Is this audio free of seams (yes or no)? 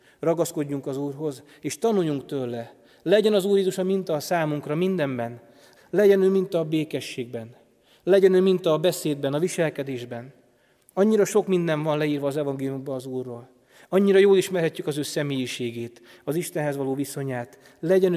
no